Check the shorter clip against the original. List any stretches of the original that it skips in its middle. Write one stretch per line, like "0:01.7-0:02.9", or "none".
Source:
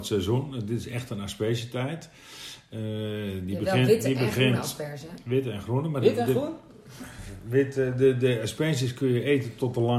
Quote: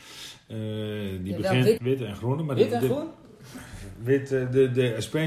0:04.0-0:05.2